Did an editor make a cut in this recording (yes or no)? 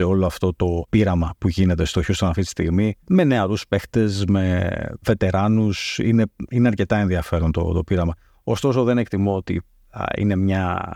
no